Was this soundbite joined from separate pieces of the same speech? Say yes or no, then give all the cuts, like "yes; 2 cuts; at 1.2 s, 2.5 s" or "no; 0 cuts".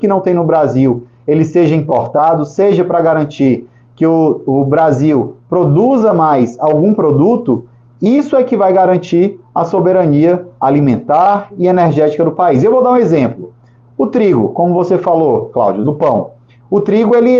no; 0 cuts